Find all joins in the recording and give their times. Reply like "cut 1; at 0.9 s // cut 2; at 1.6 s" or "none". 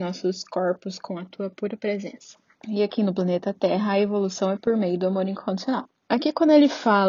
cut 1; at 2.6 s // cut 2; at 5.9 s